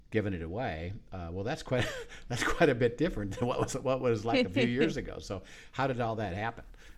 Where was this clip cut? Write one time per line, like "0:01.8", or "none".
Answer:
none